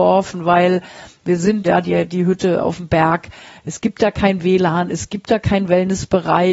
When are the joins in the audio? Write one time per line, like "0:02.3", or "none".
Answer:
0:01.6

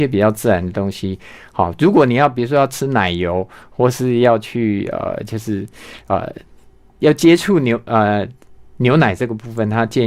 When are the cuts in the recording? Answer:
none

